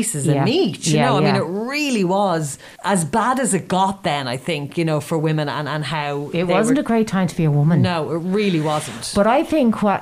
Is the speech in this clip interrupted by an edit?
yes; 1 cut; at 2.8 s

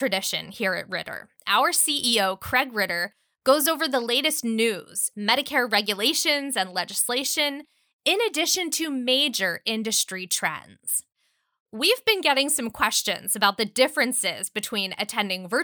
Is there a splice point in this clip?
yes; 1 cut; at 5.1 s

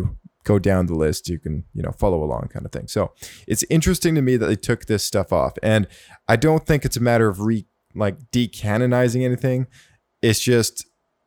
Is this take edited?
no; 0 cuts

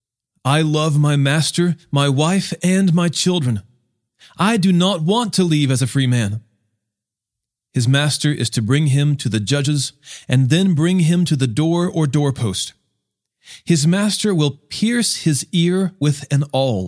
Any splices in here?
no; 0 cuts

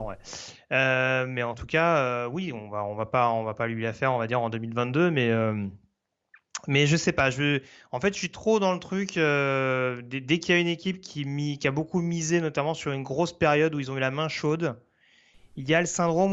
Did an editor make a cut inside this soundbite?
no; 0 cuts

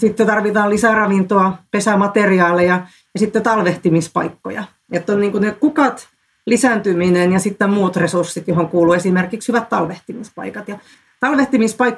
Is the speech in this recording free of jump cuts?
yes; 0 cuts

